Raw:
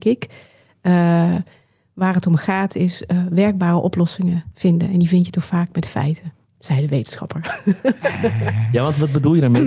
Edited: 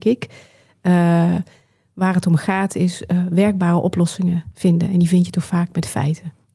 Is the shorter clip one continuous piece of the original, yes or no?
yes